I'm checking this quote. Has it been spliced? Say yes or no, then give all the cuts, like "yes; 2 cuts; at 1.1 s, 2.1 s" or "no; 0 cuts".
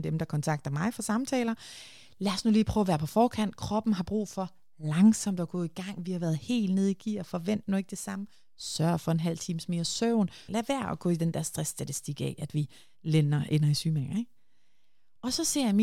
yes; 1 cut; at 10.5 s